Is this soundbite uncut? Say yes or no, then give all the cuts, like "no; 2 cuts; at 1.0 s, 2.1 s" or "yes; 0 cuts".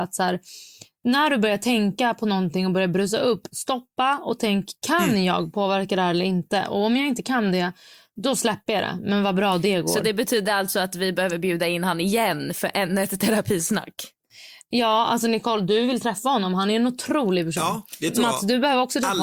yes; 0 cuts